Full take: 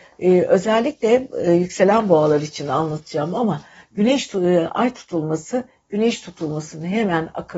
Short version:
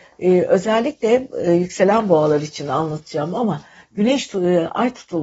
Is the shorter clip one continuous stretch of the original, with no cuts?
yes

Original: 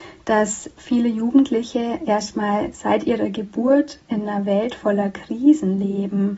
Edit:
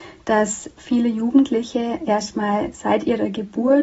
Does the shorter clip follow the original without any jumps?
yes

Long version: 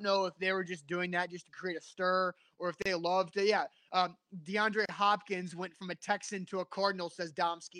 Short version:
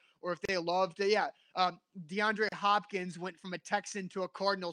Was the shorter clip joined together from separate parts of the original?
no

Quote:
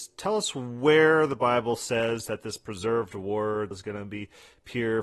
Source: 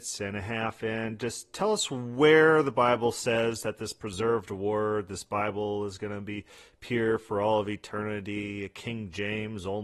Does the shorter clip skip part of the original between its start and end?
yes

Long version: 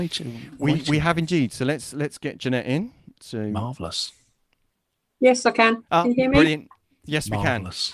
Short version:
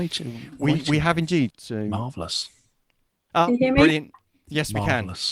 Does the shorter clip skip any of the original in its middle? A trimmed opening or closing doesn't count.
yes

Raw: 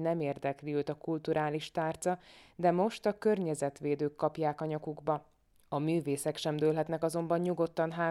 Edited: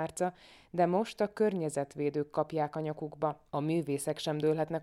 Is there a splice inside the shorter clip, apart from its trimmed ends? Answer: yes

